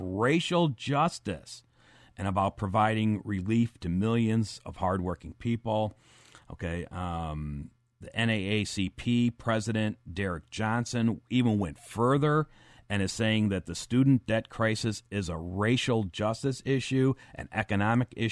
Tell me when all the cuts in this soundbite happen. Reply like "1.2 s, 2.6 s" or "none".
none